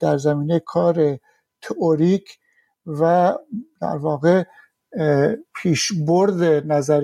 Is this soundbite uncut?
no; 1 cut; at 5.5 s

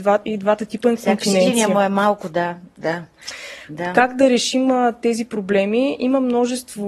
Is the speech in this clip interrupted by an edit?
no; 0 cuts

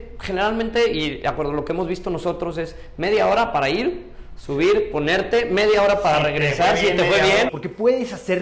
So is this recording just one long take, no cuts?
no; 1 cut; at 7.5 s

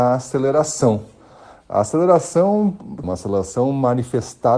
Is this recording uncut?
no; 1 cut; at 3.0 s

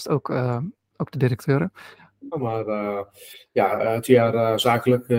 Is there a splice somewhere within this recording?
yes; 2 cuts; at 0.9 s, 2.3 s

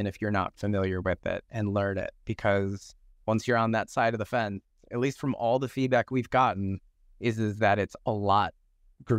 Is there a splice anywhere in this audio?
no; 0 cuts

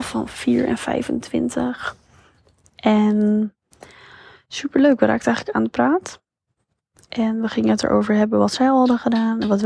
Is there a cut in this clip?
no; 0 cuts

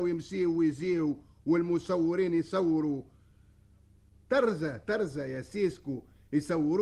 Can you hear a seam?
no; 0 cuts

